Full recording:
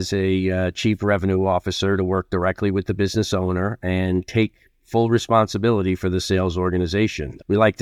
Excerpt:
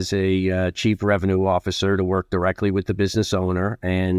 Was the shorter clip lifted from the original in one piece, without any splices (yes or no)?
yes